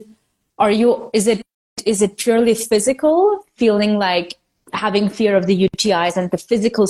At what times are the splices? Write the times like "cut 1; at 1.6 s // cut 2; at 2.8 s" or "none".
none